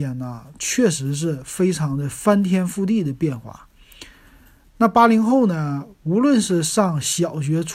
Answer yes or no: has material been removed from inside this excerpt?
no